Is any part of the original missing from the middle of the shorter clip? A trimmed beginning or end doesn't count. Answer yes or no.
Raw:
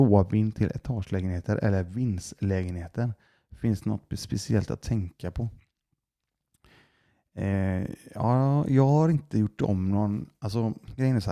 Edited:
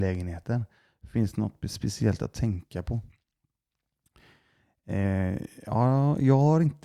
no